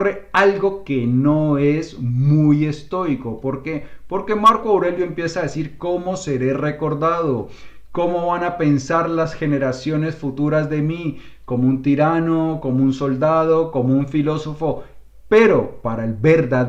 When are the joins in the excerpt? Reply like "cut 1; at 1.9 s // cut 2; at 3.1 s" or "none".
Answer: none